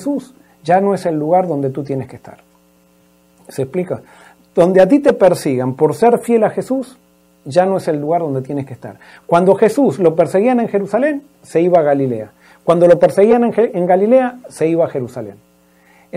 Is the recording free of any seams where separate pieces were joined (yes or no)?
yes